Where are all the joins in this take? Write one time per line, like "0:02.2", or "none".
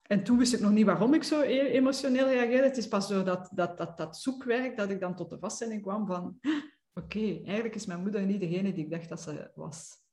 none